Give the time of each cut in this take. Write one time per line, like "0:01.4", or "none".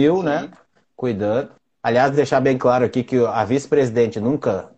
none